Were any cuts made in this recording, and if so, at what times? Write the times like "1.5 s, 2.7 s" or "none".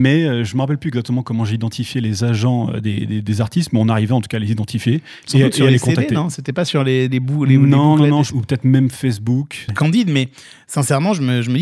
8.3 s, 9.7 s